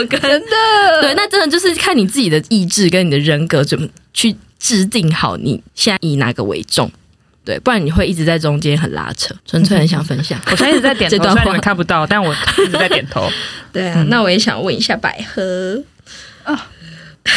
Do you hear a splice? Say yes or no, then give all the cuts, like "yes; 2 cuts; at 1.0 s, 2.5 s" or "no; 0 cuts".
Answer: yes; 1 cut; at 9.4 s